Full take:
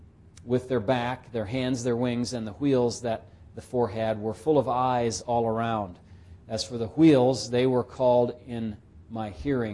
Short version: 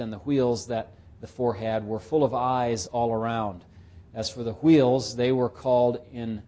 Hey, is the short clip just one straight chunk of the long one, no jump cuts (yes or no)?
yes